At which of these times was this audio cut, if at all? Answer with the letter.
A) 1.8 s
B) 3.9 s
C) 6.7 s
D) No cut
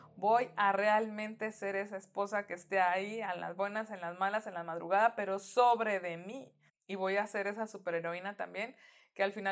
C